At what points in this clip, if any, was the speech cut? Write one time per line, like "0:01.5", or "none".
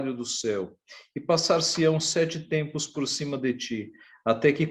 none